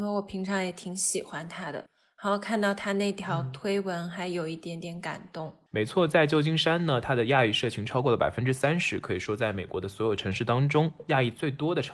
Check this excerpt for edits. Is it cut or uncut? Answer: uncut